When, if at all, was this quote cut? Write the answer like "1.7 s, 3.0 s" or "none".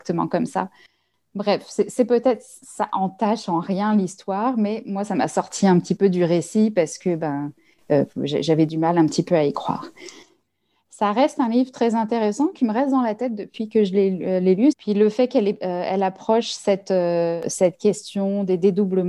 14.7 s